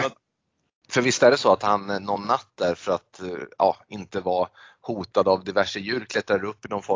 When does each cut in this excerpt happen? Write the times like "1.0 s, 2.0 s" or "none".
none